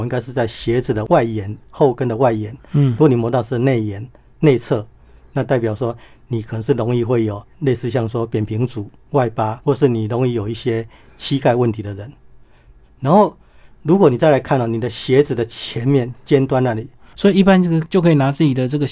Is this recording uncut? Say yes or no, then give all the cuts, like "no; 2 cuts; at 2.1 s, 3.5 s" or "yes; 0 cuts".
no; 1 cut; at 17.1 s